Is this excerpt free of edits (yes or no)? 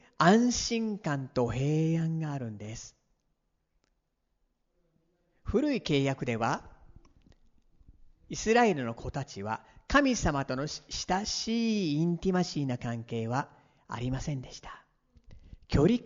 yes